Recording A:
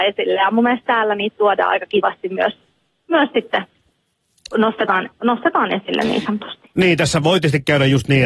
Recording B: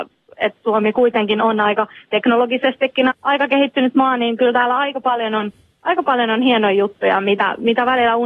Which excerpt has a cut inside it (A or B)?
B